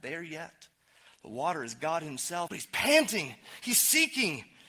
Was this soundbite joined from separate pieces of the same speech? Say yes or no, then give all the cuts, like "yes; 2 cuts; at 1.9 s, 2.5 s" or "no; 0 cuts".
yes; 1 cut; at 2.5 s